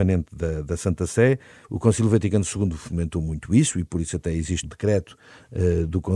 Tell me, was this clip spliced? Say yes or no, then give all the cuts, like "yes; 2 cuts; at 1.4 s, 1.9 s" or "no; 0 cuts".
yes; 2 cuts; at 1.6 s, 4.6 s